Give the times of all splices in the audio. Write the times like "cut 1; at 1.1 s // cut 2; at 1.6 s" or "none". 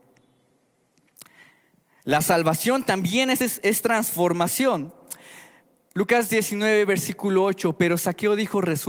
none